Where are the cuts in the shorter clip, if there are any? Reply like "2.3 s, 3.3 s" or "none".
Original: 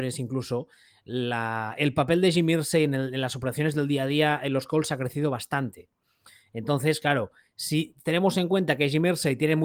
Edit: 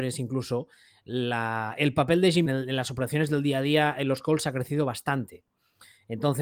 2.5 s